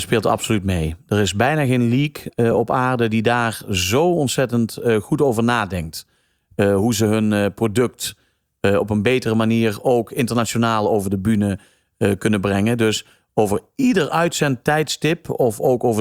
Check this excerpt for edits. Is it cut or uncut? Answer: uncut